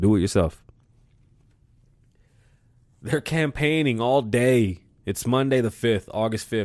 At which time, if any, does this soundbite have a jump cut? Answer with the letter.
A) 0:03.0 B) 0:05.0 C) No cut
C